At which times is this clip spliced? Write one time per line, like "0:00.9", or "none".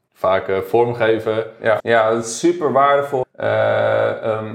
0:01.8
0:03.2